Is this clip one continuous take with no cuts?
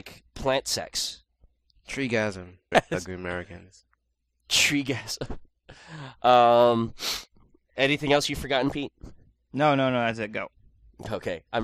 no; 1 cut; at 2.7 s

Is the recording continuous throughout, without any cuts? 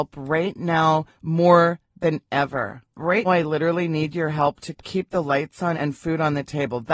no; 2 cuts; at 3.2 s, 5.7 s

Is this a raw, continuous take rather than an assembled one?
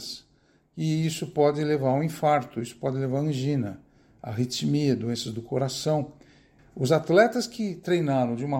no; 1 cut; at 6.6 s

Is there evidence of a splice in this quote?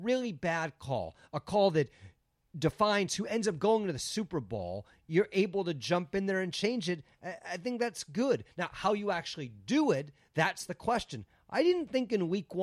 no; 0 cuts

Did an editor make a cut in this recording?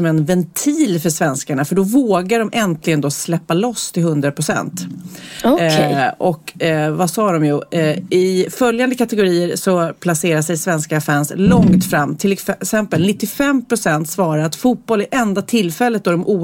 no; 0 cuts

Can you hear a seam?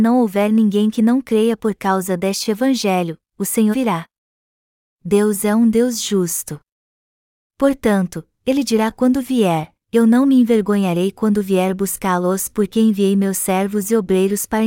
yes; 1 cut; at 3.7 s

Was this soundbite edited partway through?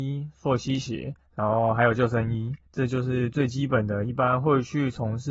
no; 0 cuts

